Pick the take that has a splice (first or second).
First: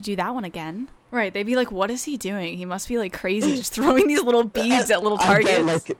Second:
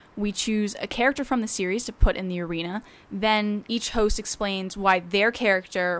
first